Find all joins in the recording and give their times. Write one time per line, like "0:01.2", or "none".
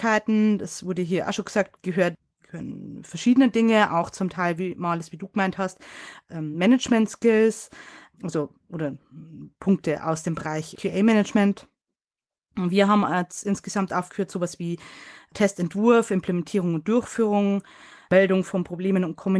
none